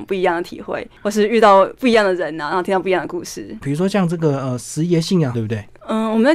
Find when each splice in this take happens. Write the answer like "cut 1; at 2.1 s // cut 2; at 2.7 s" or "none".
cut 1; at 3.6 s // cut 2; at 5.3 s